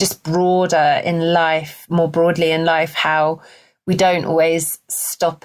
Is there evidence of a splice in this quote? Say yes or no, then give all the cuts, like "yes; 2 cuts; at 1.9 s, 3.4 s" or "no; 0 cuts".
no; 0 cuts